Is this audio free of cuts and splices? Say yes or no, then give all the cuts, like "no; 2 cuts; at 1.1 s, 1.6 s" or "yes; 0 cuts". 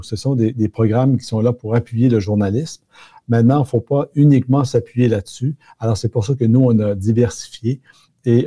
yes; 0 cuts